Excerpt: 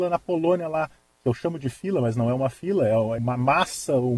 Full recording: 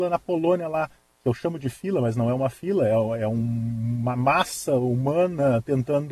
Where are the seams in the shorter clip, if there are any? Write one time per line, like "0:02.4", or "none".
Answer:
0:03.2